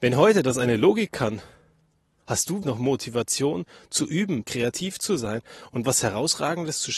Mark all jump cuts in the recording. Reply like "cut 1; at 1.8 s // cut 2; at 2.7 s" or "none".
cut 1; at 2.6 s // cut 2; at 4.4 s